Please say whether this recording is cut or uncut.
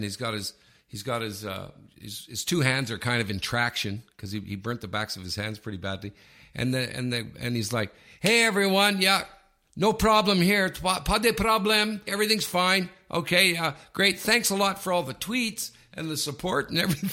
cut